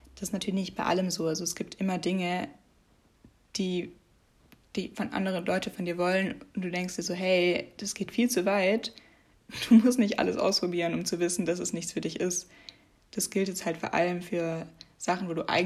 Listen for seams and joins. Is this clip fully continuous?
yes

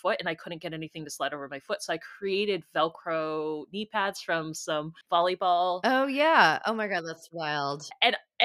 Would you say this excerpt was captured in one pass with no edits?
no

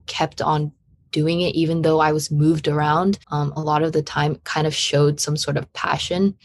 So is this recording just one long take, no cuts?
no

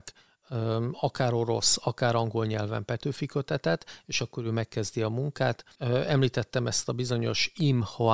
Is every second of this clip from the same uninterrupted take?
no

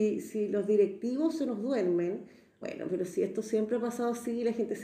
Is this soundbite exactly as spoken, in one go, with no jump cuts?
no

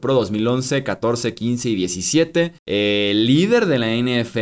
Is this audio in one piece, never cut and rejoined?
no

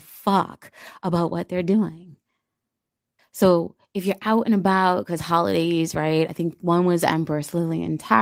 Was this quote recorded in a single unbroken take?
no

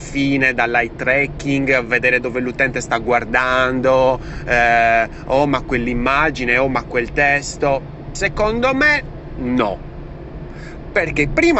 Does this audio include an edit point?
no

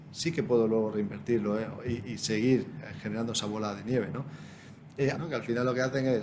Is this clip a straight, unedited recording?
no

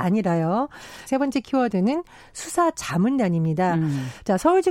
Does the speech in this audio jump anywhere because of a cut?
yes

